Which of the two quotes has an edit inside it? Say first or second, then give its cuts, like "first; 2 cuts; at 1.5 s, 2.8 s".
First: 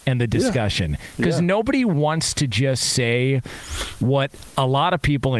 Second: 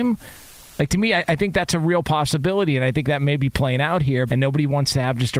second; 1 cut; at 4.3 s